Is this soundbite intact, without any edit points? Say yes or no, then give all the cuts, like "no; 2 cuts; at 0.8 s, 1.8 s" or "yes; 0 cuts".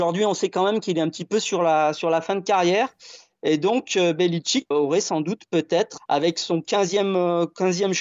no; 2 cuts; at 4.7 s, 6.0 s